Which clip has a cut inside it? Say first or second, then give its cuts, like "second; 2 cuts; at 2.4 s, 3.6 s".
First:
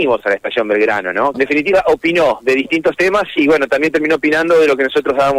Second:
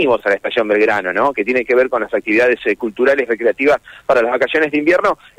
first; 1 cut; at 1.3 s